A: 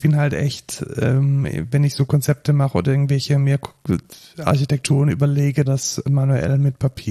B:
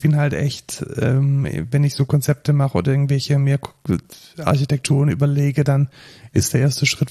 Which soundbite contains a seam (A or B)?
A